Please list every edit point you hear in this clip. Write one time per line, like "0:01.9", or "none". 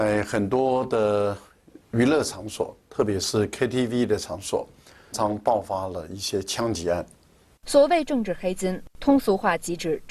0:05.1
0:07.6